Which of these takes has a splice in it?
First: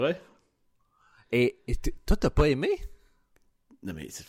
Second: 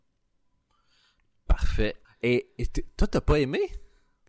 second; 1 cut; at 2.0 s

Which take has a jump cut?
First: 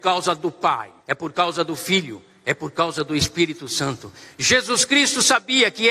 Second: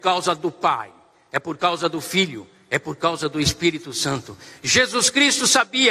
first; 1 cut; at 1.0 s

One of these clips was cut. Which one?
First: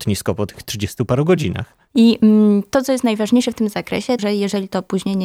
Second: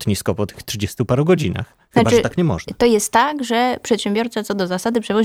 first; 2 cuts; at 1.9 s, 4.2 s

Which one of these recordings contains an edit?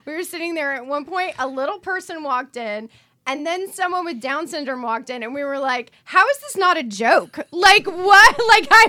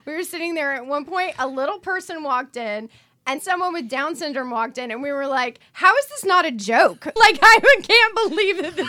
second; 2 cuts; at 3.4 s, 7.2 s

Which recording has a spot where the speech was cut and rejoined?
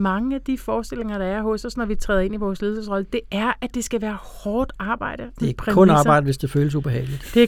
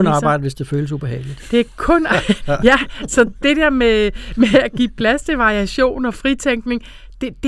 first; 1 cut; at 5.4 s

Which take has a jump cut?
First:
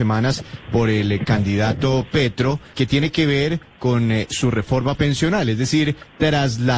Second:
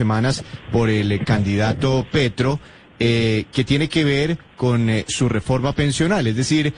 first; 1 cut; at 2.7 s

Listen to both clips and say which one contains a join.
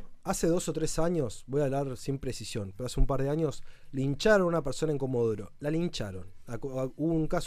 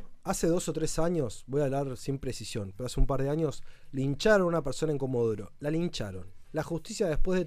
second; 1 cut; at 6.4 s

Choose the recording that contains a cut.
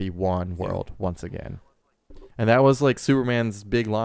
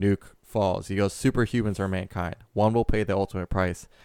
first; 1 cut; at 2.3 s

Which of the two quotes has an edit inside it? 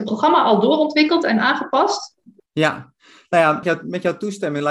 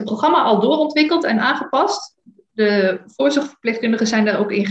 first; 2 cuts; at 2.4 s, 3.6 s

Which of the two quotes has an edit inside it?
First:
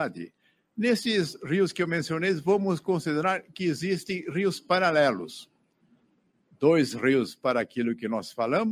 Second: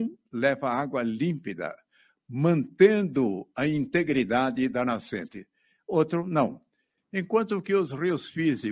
second; 1 cut; at 7.0 s

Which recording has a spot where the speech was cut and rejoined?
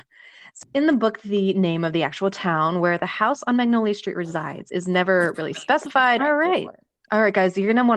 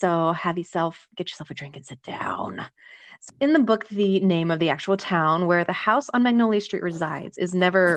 first; 1 cut; at 6.2 s

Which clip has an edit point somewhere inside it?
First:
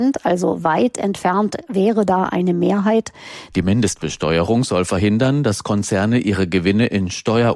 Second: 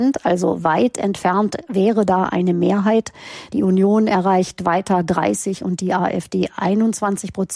first; 1 cut; at 3.5 s

